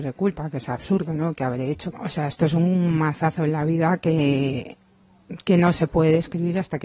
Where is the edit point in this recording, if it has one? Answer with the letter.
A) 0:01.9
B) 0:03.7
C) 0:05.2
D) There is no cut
A